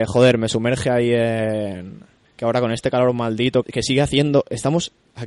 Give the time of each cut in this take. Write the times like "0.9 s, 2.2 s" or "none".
2.2 s, 3.6 s

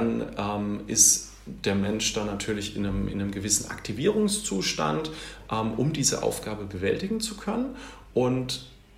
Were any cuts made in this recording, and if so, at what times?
none

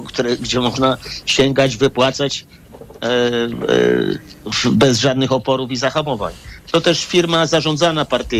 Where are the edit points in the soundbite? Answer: none

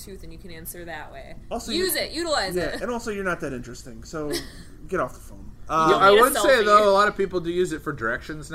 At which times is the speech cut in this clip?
none

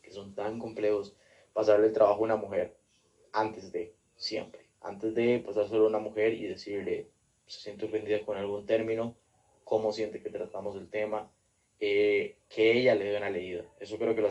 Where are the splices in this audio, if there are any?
none

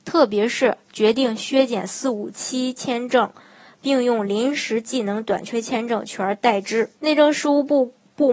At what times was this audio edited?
7.0 s

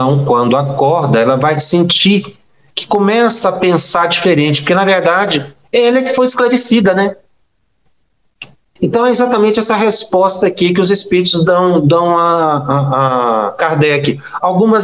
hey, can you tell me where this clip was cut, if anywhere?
8.8 s

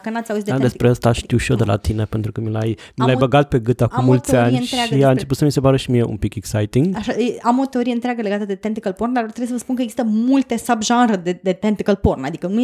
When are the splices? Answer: none

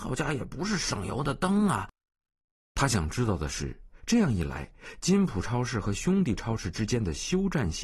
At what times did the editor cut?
none

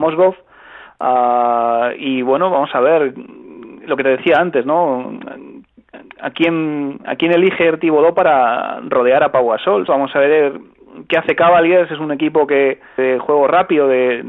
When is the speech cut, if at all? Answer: 9.9 s, 13.0 s

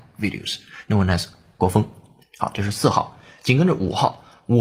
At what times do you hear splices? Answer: none

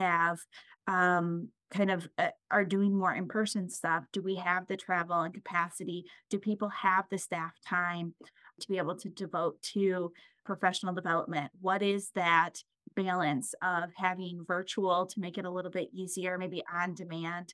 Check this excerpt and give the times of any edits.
none

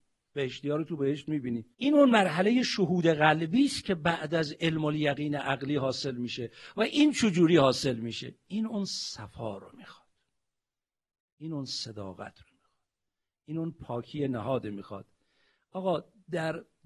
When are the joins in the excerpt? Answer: 1.7 s

